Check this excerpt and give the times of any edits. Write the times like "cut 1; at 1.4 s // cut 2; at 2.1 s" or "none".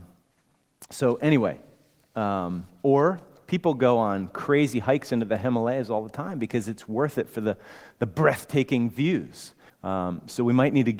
cut 1; at 9.7 s

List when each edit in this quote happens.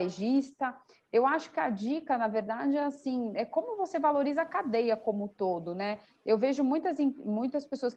none

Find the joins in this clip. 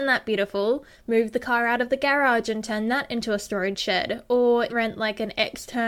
cut 1; at 0.9 s // cut 2; at 4.7 s

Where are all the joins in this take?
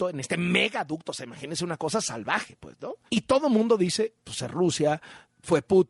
cut 1; at 3.1 s

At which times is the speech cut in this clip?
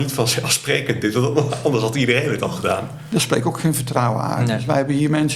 cut 1; at 3.1 s

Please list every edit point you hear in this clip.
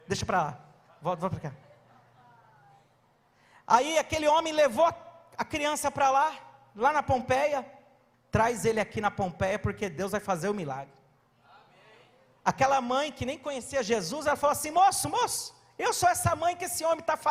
cut 1; at 8.1 s

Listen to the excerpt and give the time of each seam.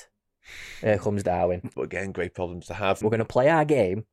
cut 1; at 1.7 s // cut 2; at 3.0 s

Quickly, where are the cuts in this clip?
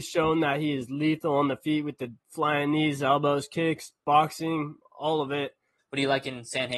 cut 1; at 5.8 s

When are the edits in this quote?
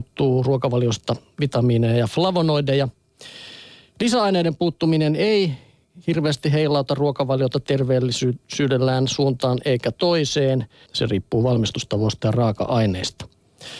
cut 1; at 10.9 s

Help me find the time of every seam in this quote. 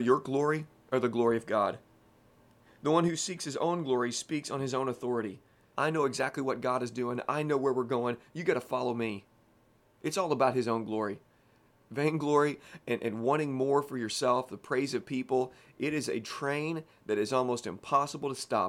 cut 1; at 5.7 s // cut 2; at 11.7 s

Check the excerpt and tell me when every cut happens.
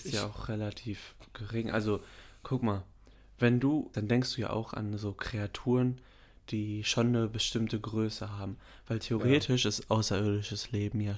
cut 1; at 3.9 s

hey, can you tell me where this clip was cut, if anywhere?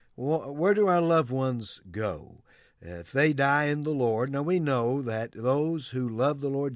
none

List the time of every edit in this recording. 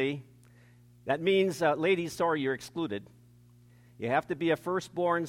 none

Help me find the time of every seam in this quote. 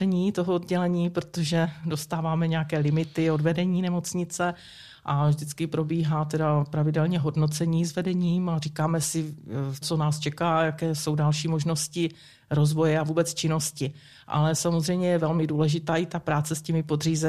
cut 1; at 9.8 s

